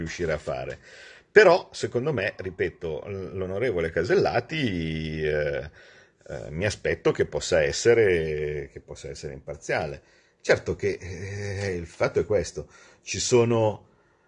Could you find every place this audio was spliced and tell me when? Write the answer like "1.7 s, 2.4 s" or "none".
none

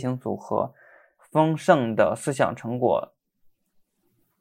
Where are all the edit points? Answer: 1.2 s

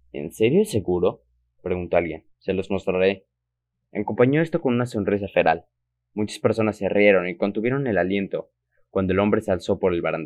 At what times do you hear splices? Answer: 2.3 s

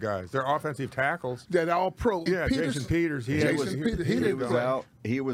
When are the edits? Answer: 2.3 s

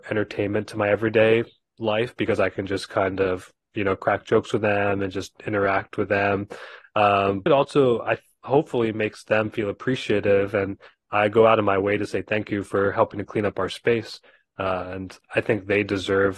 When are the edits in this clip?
7.5 s

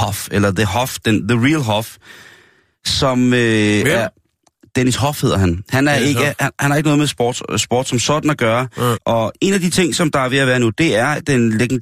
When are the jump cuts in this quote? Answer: 8.9 s

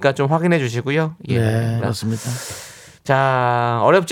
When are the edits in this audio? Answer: 1.8 s

